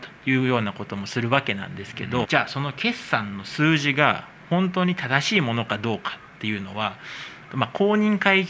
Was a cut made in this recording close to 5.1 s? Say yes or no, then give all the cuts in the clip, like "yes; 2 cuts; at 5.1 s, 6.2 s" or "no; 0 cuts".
no; 2 cuts; at 2.2 s, 7.5 s